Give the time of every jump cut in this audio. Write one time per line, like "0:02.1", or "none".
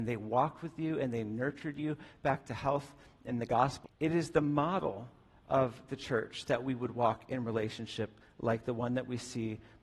0:03.8